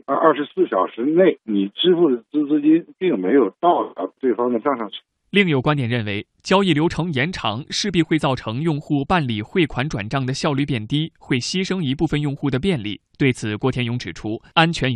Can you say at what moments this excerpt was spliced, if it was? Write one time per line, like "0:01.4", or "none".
none